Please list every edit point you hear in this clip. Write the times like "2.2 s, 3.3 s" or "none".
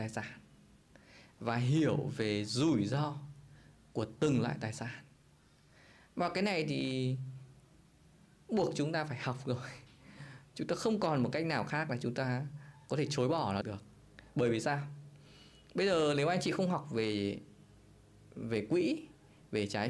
13.6 s